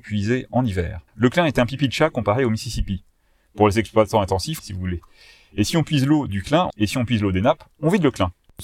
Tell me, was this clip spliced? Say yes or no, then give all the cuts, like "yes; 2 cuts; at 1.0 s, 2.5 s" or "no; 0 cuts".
yes; 3 cuts; at 1.1 s, 4.6 s, 6.7 s